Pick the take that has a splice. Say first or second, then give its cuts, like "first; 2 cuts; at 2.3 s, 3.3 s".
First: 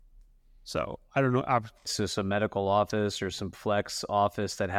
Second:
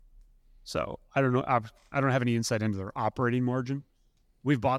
first; 1 cut; at 1.9 s